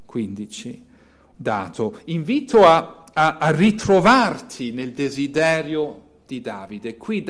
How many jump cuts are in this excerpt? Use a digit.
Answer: 1